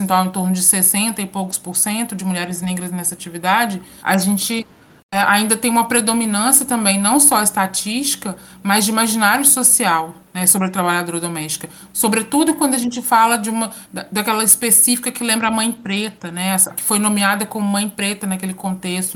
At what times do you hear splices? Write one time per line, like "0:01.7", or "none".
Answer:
0:04.0
0:11.9
0:16.7